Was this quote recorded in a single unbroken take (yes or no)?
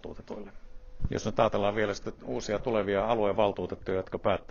no